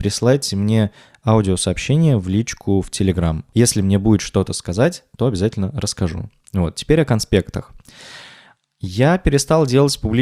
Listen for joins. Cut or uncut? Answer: uncut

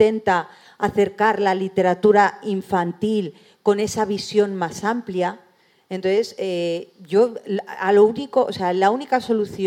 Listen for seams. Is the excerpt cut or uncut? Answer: uncut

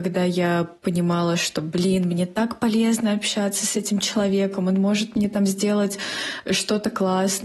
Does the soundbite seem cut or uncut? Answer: uncut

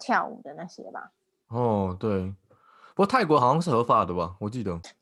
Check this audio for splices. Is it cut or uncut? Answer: uncut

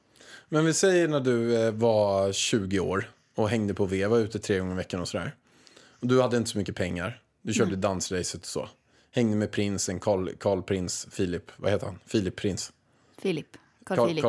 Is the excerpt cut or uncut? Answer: uncut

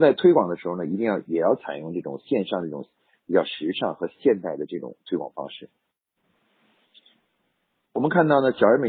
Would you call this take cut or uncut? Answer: uncut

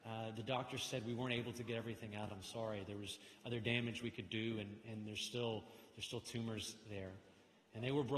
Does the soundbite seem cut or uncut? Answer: uncut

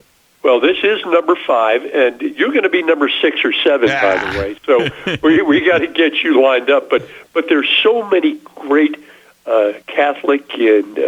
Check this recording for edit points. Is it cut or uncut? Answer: cut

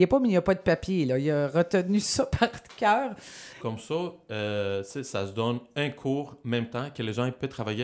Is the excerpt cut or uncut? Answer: cut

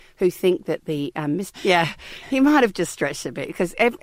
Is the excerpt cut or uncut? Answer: cut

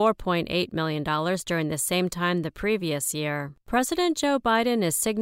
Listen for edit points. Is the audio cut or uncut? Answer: cut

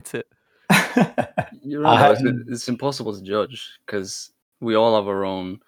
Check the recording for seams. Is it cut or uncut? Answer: uncut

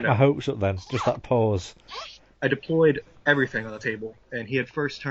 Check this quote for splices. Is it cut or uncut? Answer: cut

